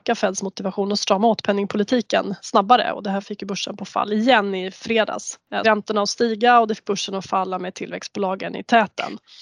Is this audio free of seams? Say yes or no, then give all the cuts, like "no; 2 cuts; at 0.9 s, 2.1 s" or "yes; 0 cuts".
no; 1 cut; at 5.6 s